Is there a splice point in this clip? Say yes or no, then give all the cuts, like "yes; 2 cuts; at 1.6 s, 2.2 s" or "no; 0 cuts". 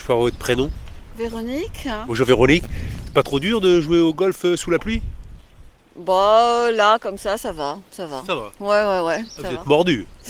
no; 0 cuts